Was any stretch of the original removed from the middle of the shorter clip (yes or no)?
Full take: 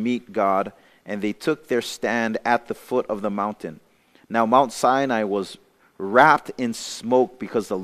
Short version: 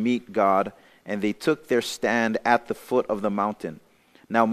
no